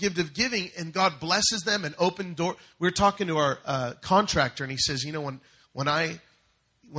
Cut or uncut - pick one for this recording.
uncut